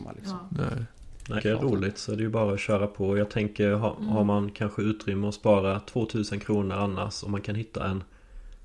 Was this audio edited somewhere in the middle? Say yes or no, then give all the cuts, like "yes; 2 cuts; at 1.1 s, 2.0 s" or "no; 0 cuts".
yes; 1 cut; at 1.4 s